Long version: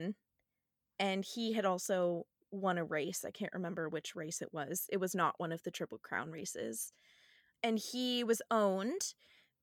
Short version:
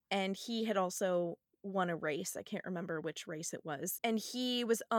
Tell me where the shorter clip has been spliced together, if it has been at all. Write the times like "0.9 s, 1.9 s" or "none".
4.0 s

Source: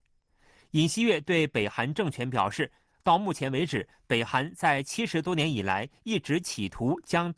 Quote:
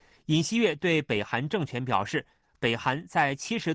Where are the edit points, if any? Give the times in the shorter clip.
2.6 s

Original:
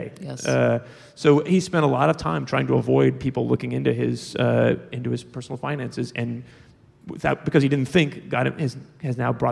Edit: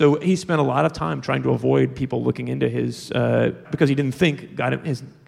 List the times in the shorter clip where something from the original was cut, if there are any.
3.6 s

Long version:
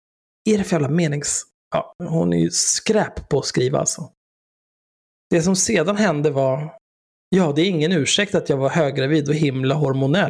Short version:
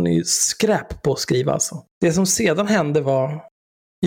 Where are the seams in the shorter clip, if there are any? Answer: 1.9 s

